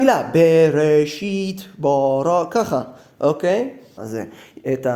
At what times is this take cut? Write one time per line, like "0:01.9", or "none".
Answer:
0:04.0